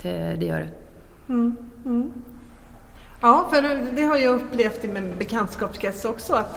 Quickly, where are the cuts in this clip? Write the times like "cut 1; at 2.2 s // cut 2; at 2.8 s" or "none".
cut 1; at 3.9 s